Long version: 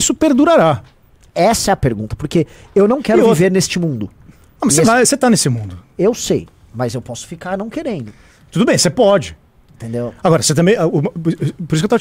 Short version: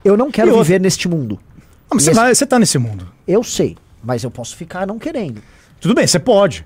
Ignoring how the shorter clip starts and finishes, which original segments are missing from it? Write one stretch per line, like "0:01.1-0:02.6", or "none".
none